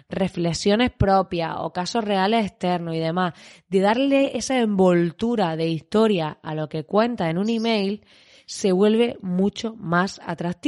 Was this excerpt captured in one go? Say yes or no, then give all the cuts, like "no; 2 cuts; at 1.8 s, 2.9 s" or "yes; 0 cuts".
yes; 0 cuts